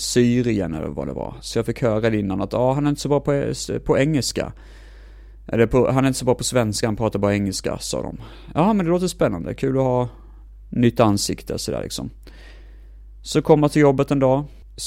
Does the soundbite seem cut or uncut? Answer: uncut